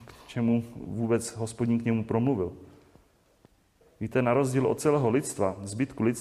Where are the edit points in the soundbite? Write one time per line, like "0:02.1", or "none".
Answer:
none